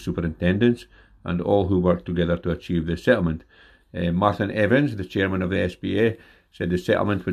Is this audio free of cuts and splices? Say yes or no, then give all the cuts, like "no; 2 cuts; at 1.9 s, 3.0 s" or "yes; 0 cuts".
yes; 0 cuts